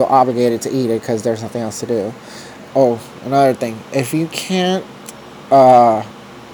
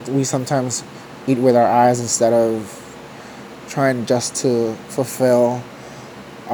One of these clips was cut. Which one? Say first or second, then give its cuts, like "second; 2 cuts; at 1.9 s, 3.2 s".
first; 1 cut; at 2.7 s